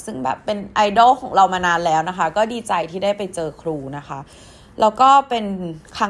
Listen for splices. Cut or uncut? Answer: uncut